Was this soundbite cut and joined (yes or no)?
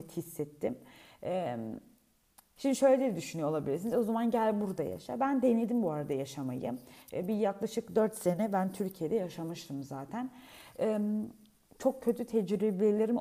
yes